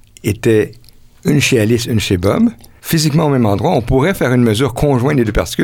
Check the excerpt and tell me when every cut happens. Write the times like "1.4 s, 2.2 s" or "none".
2.8 s